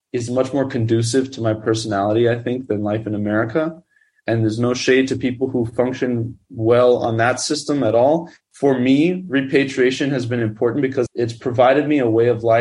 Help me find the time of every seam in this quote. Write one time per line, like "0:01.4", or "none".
0:08.4
0:11.1